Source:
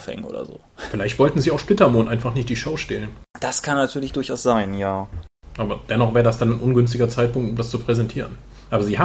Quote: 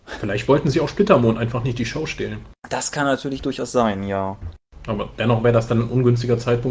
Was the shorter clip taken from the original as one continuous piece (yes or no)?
yes